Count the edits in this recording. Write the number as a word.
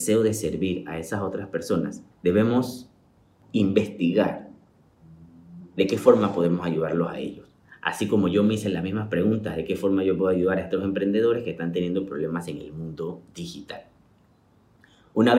one